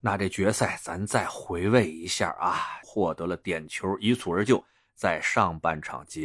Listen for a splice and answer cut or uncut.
cut